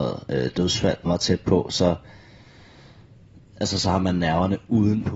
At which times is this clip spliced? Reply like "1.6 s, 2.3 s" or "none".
1.1 s